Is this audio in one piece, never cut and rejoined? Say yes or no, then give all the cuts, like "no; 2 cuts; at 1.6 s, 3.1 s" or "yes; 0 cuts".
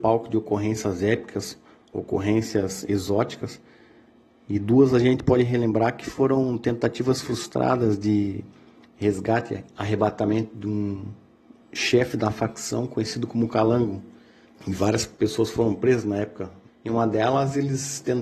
no; 2 cuts; at 14.5 s, 16.7 s